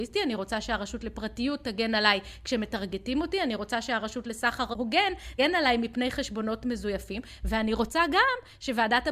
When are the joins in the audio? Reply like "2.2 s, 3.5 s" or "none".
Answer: 5.4 s